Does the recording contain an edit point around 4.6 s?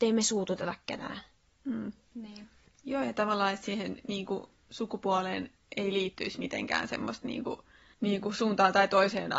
no; 1 cut; at 2.4 s

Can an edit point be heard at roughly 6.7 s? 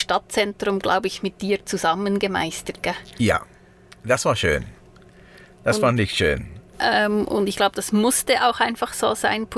yes; 1 cut; at 6.7 s

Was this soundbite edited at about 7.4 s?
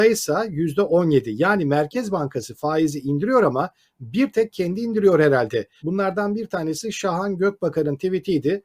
no; 1 cut; at 5.8 s

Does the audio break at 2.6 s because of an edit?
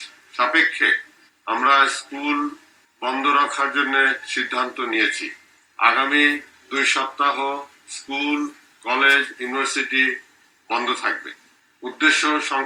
no; 0 cuts

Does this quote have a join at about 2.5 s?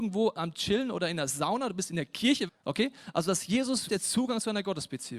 yes; 2 cuts; at 2.5 s, 3.9 s

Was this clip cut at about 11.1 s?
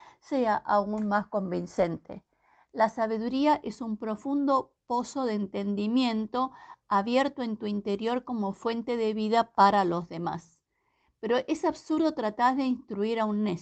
no; 0 cuts

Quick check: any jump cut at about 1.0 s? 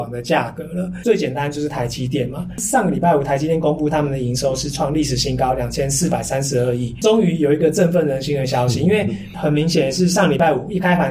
yes; 1 cut; at 1.0 s

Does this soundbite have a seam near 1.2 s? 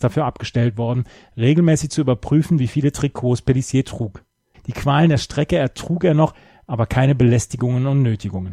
no; 1 cut; at 4.5 s

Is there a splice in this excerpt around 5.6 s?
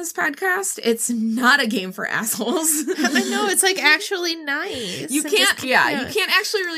yes; 1 cut; at 5.6 s

